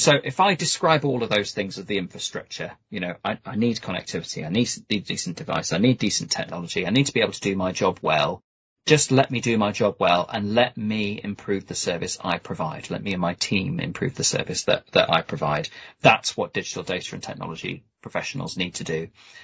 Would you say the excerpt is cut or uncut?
uncut